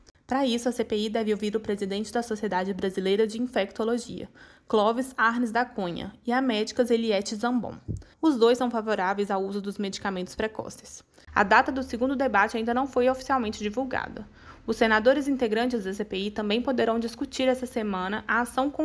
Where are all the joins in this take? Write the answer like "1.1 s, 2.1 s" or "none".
8.1 s, 11.3 s

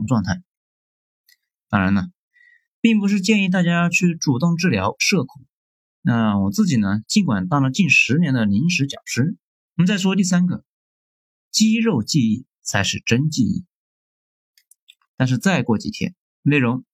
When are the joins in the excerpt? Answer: 9.7 s, 15.1 s

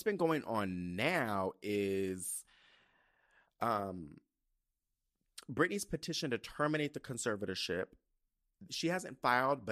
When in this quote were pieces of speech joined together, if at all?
8.7 s

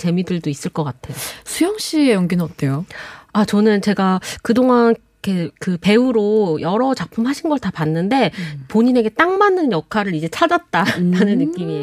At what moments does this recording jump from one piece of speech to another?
5.6 s

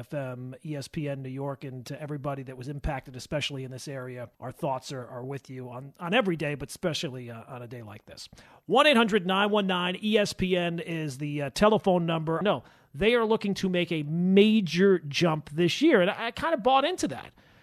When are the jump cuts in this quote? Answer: 4.3 s, 12.4 s

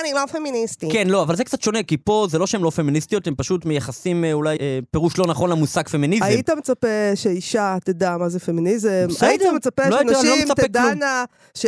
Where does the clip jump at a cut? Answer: 4.6 s

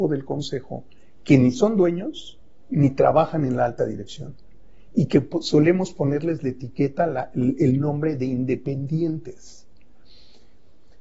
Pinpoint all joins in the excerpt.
none

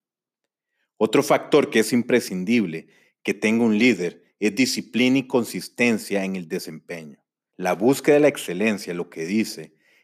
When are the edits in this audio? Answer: 7.5 s

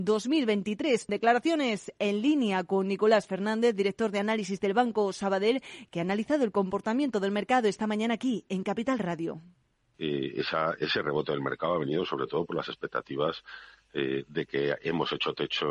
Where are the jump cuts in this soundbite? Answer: 1.1 s

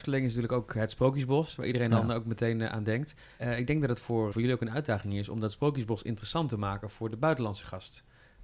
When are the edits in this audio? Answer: 4.3 s

